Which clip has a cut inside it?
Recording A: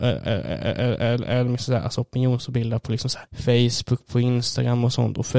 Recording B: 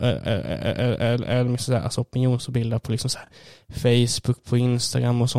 A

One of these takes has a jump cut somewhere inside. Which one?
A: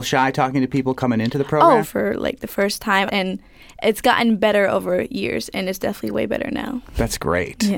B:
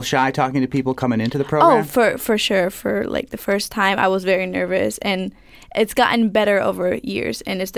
A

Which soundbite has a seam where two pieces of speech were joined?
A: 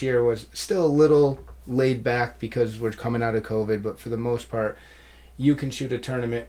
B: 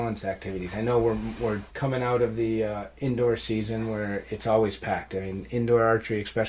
B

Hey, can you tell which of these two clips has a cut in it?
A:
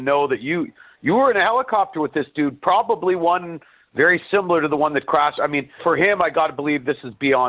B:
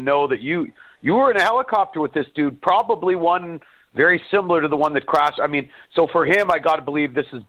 A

